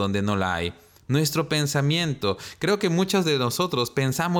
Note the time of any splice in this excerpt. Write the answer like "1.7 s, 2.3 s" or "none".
0.9 s